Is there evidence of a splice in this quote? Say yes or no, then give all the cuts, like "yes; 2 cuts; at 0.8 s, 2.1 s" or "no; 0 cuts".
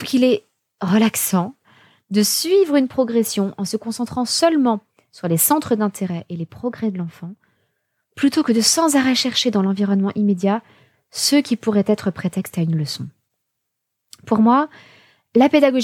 no; 0 cuts